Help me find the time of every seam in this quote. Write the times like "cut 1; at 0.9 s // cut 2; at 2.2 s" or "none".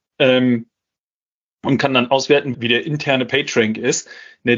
cut 1; at 2.5 s